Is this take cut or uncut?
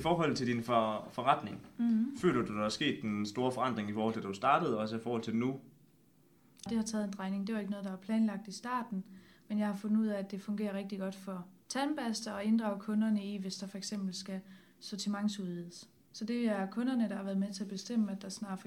cut